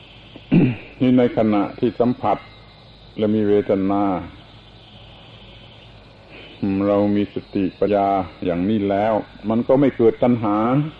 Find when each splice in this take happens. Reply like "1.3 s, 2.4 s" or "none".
7.9 s

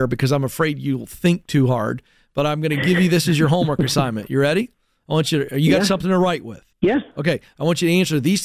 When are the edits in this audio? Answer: 6.7 s

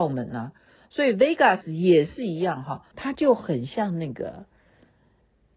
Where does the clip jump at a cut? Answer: 2.9 s

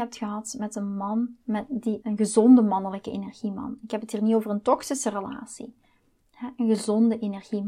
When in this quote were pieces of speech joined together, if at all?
2.0 s

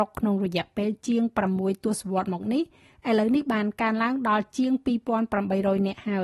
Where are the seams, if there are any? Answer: none

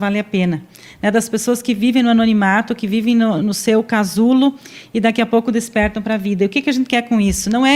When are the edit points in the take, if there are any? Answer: 3.4 s

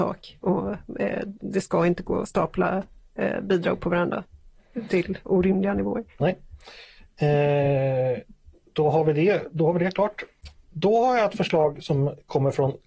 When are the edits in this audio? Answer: none

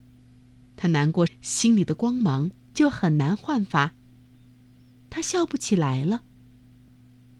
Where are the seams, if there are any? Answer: 1.3 s

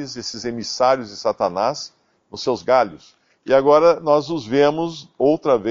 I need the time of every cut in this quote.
none

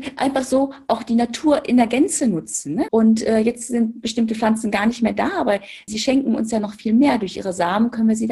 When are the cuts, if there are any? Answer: 2.9 s, 5.9 s

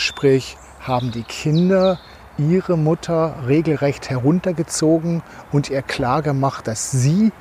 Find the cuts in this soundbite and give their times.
none

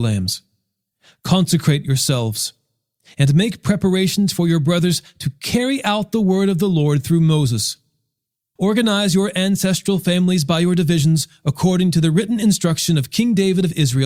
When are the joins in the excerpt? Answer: 8.6 s

